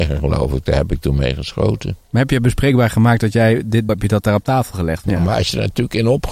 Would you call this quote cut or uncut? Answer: cut